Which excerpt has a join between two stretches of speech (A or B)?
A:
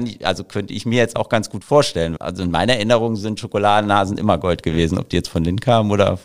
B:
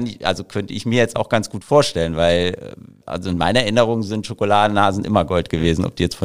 A